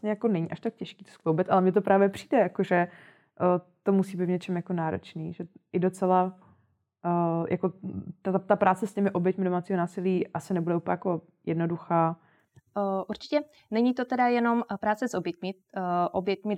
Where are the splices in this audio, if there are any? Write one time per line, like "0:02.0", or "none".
none